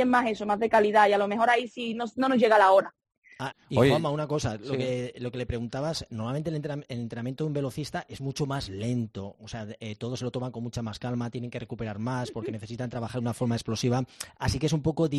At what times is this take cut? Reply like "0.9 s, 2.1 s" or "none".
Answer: 3.5 s